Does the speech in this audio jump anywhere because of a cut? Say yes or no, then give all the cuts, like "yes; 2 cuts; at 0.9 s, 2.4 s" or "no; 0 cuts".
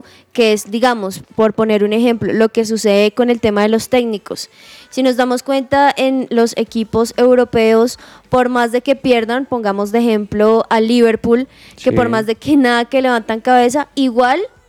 no; 0 cuts